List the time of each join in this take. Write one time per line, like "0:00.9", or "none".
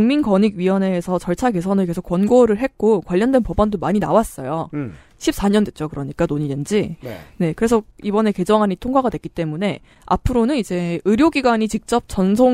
none